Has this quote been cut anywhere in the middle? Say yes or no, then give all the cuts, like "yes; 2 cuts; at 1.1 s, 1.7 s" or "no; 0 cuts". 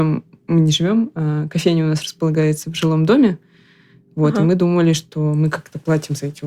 no; 0 cuts